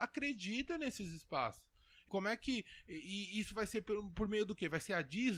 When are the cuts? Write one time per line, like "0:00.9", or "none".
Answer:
0:02.1